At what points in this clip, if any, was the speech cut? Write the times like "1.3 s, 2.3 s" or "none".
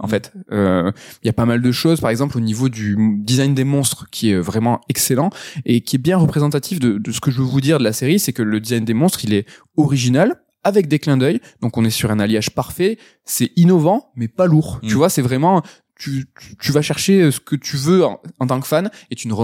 none